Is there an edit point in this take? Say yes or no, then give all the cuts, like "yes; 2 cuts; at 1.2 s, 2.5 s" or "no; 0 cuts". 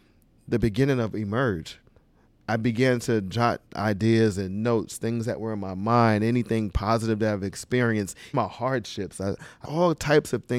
yes; 2 cuts; at 8.3 s, 9.6 s